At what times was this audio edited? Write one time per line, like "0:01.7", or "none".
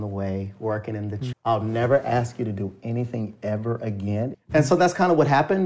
0:01.3
0:04.3